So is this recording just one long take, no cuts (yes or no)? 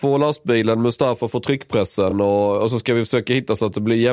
yes